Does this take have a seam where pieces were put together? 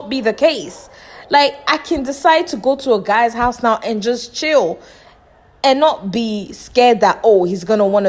no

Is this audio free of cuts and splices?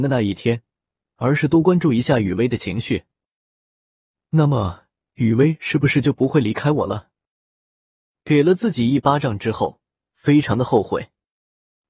no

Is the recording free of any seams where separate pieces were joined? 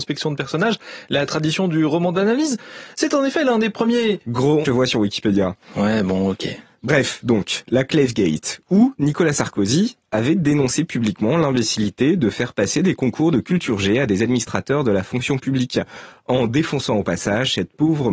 no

